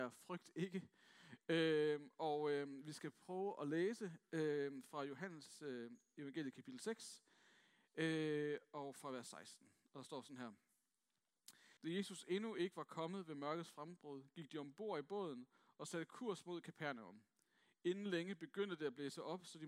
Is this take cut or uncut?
cut